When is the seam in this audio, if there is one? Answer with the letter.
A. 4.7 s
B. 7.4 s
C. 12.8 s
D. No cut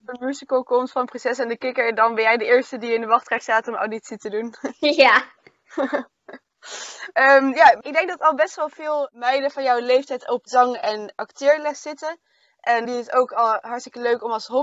C